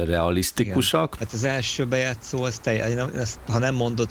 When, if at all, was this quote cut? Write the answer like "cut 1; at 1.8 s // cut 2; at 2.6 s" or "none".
cut 1; at 1.2 s